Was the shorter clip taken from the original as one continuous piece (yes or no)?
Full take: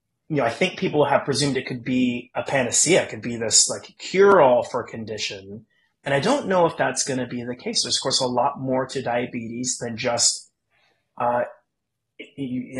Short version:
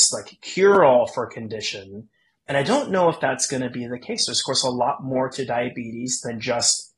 yes